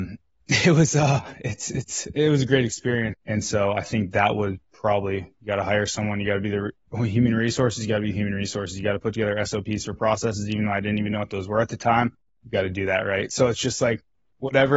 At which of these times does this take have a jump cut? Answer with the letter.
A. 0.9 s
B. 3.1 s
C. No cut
B